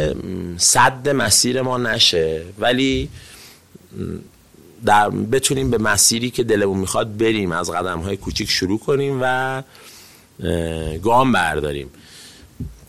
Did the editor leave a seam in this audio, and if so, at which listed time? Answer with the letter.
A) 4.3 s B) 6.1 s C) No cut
C